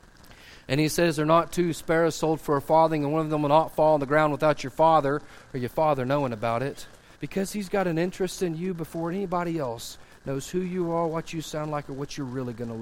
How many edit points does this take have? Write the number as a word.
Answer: one